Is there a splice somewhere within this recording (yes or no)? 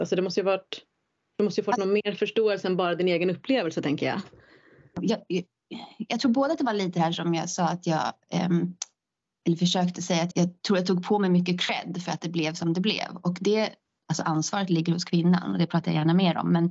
yes